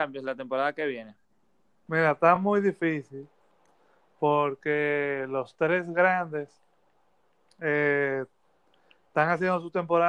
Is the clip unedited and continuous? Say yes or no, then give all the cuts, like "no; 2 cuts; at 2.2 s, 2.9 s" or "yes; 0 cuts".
yes; 0 cuts